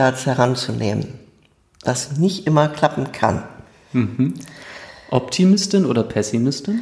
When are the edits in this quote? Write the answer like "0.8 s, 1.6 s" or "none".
none

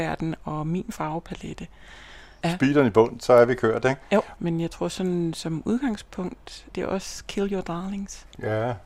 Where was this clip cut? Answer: 2.4 s, 4.4 s, 6.7 s

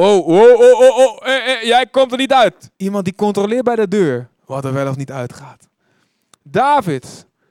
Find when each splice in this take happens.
2.7 s, 4.4 s, 6.3 s

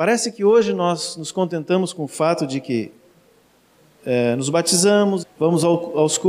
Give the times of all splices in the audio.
5.2 s

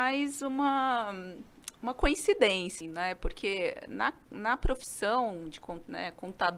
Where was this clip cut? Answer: 2.8 s

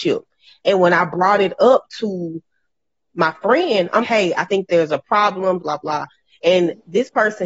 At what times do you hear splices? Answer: 4.0 s, 5.6 s

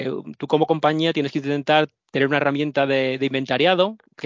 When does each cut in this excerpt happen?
none

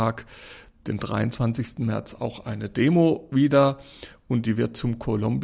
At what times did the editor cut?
none

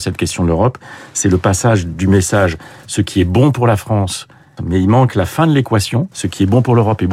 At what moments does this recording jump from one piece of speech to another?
4.6 s, 6.1 s

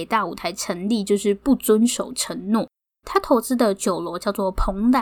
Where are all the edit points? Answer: 3.0 s

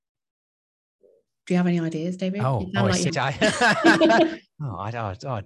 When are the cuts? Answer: 3.1 s

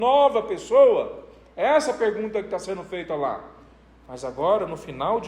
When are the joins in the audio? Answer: none

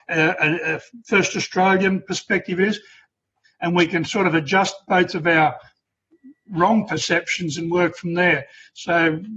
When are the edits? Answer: 3.4 s

